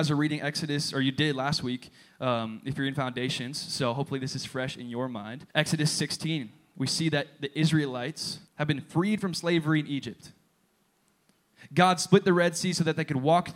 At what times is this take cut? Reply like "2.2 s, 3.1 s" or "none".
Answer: 5.5 s, 8.5 s